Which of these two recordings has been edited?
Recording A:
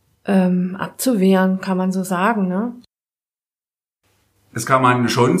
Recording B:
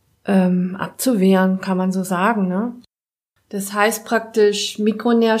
B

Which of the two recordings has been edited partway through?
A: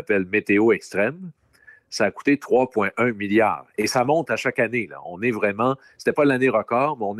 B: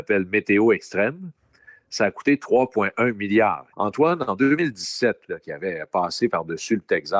B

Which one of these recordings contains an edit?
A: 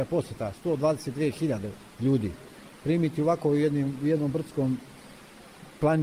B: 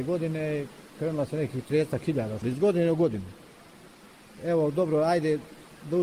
B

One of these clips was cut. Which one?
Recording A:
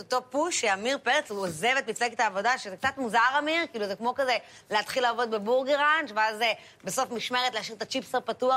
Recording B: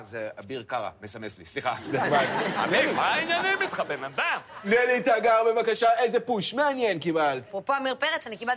B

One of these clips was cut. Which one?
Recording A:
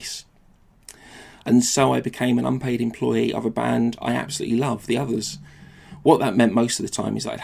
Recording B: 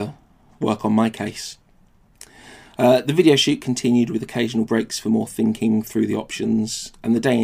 A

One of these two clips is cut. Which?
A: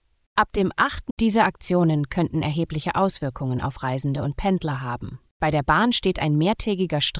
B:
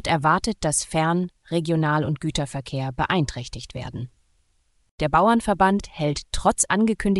A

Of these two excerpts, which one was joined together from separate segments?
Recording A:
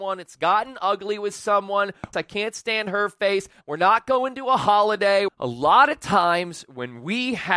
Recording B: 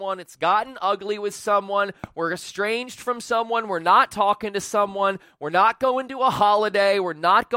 A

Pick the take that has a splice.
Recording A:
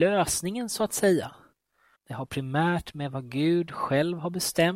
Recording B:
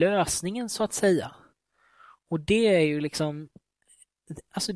A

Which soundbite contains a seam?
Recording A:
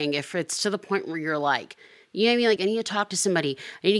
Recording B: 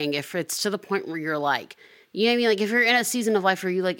A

